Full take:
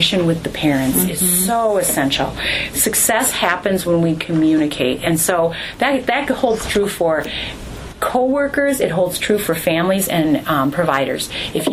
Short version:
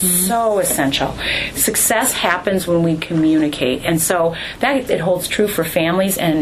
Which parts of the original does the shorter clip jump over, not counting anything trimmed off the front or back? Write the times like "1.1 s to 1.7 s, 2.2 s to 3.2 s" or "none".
6.1 s to 8.8 s